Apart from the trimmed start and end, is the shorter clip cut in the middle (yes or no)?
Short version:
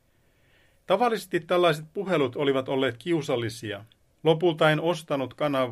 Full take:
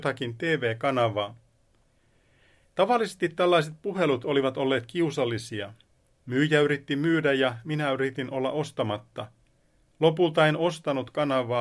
yes